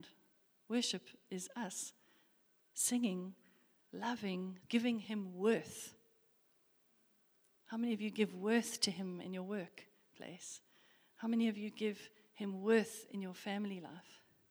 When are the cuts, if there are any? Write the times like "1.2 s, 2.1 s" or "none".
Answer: 4.6 s